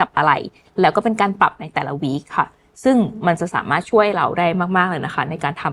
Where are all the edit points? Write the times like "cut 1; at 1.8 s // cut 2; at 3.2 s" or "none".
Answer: none